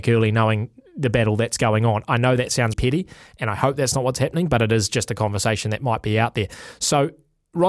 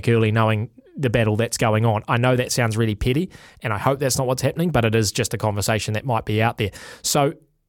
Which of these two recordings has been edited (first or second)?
first